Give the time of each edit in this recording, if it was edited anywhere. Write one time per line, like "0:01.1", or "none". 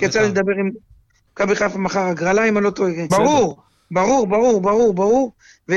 0:01.3
0:03.1

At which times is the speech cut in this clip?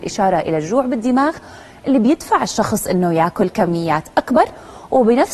none

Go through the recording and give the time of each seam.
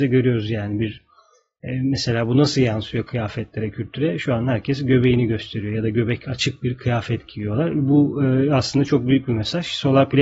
none

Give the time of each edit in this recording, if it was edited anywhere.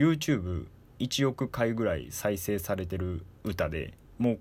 0:03.4

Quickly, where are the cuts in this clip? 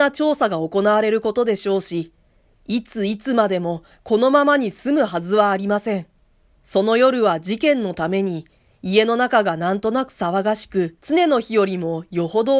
0:06.6
0:11.0

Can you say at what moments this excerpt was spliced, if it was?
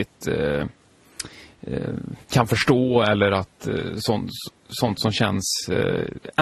0:02.2

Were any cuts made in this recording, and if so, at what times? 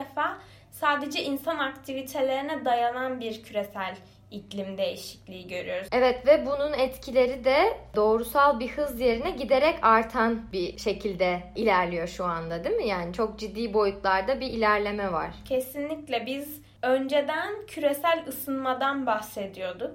0:05.9

